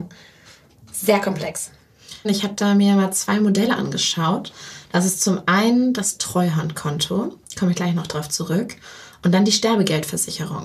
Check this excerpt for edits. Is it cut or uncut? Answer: cut